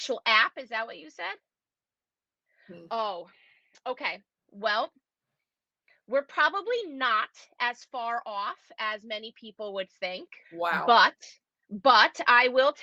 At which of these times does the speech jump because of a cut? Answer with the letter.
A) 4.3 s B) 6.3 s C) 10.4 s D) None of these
C